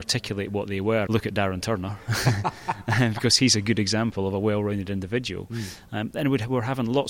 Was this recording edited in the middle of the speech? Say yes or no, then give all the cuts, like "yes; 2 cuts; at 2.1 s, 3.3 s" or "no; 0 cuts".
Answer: yes; 1 cut; at 1.1 s